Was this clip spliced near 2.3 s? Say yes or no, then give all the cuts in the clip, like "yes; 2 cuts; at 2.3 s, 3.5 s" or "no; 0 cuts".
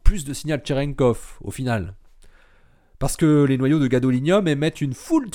no; 0 cuts